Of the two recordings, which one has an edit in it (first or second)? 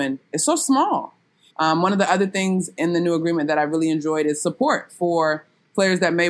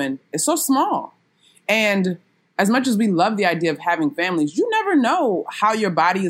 first